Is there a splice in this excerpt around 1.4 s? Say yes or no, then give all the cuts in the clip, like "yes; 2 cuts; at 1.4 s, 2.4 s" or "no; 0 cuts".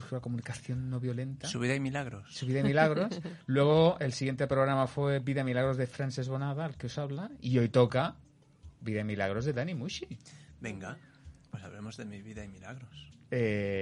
no; 1 cut; at 8.8 s